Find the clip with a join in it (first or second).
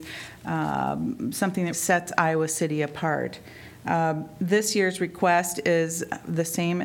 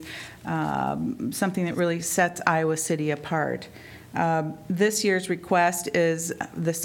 first